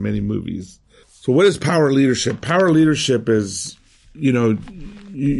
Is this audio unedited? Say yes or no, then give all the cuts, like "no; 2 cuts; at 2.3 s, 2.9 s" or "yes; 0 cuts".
no; 1 cut; at 1.0 s